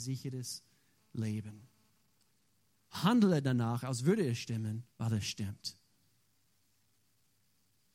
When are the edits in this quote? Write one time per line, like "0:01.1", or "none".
0:02.9
0:04.9